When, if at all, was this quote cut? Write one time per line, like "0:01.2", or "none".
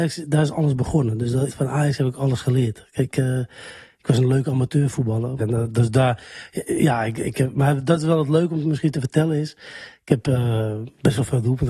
0:01.5
0:05.4